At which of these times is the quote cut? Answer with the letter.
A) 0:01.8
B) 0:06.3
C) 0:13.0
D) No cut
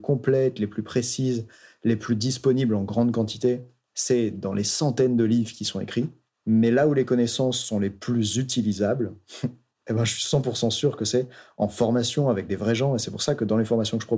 D